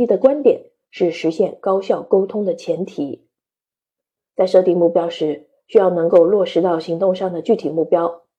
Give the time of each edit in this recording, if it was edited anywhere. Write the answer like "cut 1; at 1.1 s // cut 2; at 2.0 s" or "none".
none